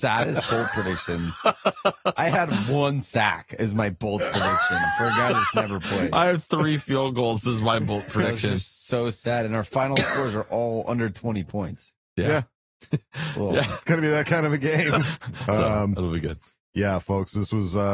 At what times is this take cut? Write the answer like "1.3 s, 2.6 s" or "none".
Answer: 15.0 s